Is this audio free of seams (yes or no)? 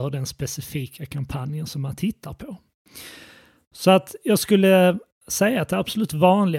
yes